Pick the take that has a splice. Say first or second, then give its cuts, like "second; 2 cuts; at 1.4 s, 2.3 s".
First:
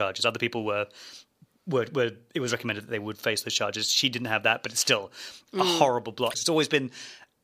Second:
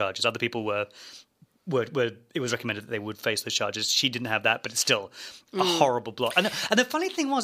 first; 1 cut; at 6.3 s